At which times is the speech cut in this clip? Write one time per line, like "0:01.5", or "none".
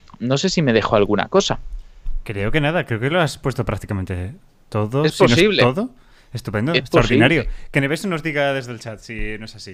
none

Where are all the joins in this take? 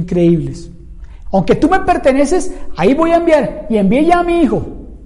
0:01.3

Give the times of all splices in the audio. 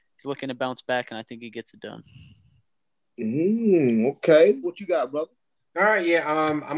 0:04.6

